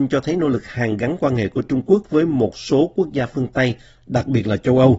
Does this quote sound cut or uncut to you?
uncut